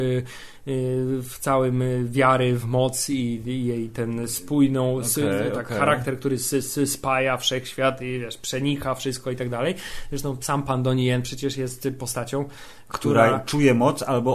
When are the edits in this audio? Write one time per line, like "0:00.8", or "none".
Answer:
none